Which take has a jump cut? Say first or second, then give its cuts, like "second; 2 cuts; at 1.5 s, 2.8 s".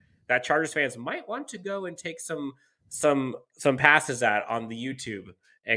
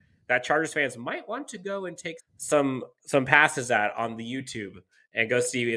second; 1 cut; at 2.2 s